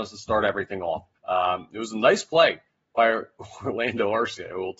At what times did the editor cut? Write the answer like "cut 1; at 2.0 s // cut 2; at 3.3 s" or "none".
cut 1; at 1.1 s